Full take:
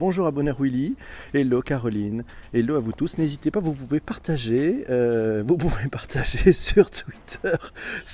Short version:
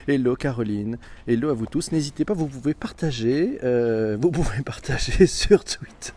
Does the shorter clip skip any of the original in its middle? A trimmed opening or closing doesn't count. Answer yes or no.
no